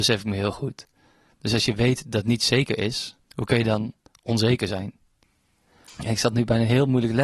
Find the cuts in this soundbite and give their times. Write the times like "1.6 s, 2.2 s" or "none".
3.2 s, 5.9 s